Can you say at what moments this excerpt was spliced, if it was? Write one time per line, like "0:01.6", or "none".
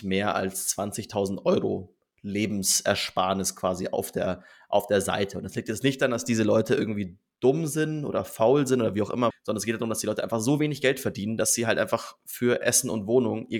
0:09.3